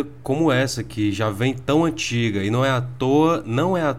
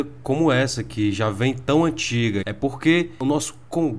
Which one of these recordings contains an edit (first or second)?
second